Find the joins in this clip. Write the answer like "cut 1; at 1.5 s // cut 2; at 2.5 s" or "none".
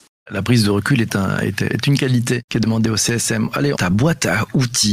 cut 1; at 3.7 s